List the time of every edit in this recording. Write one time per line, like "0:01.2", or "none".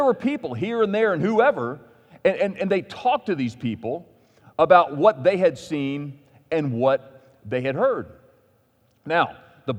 none